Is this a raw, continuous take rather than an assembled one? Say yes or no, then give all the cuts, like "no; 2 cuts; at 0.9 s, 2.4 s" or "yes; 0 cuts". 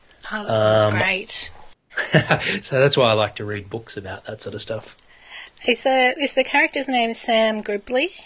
no; 1 cut; at 1.9 s